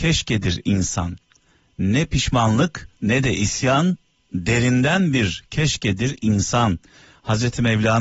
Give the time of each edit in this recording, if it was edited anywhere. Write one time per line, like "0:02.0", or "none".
0:03.0